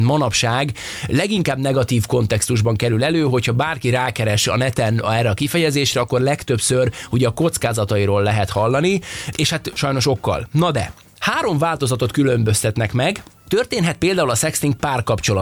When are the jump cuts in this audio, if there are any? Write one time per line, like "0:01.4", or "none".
none